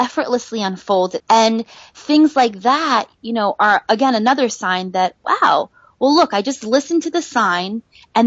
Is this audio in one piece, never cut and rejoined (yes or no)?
no